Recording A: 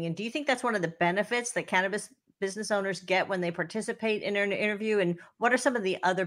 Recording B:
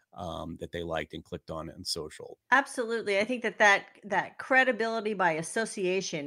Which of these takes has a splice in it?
B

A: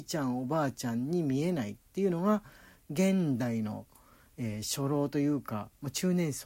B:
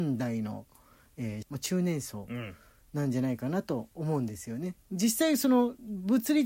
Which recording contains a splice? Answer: B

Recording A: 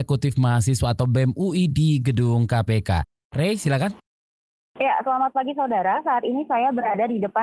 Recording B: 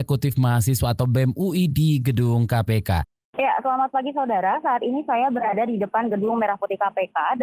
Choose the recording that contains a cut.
B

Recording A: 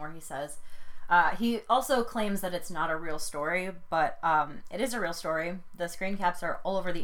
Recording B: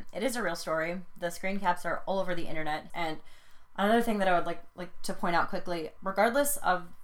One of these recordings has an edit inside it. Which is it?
B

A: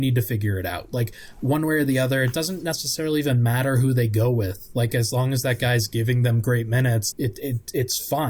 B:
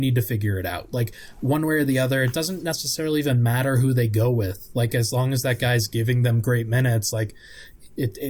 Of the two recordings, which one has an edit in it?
A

